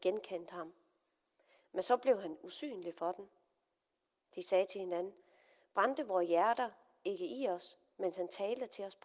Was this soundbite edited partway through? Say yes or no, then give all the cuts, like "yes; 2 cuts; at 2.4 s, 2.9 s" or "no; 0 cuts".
no; 0 cuts